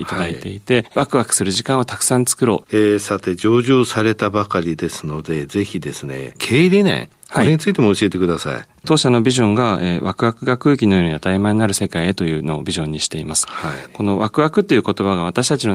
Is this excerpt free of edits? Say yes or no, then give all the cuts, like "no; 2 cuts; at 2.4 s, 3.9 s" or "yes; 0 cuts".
no; 1 cut; at 2.6 s